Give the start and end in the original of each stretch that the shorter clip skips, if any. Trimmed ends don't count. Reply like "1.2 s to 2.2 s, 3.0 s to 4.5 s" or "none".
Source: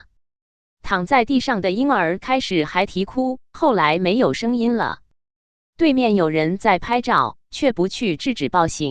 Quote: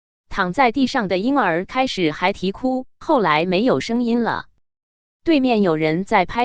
none